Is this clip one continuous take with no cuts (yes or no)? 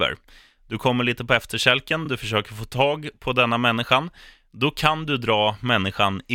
yes